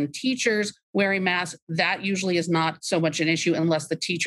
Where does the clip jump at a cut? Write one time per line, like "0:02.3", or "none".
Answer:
none